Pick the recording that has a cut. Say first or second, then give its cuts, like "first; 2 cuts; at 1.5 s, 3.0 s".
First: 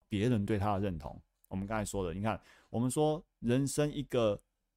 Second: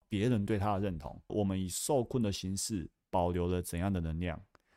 second; 1 cut; at 1.3 s